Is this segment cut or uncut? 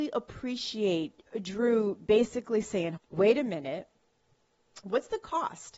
cut